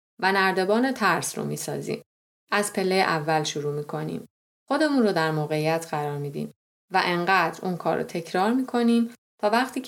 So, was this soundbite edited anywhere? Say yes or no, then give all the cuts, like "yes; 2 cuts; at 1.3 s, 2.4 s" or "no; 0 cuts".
no; 0 cuts